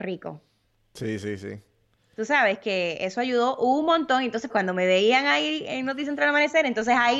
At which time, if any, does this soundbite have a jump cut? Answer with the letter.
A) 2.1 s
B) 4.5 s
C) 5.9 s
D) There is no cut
B